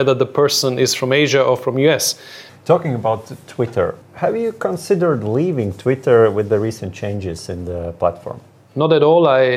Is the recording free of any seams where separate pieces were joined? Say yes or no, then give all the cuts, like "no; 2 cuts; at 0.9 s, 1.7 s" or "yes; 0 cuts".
no; 2 cuts; at 2.5 s, 4.0 s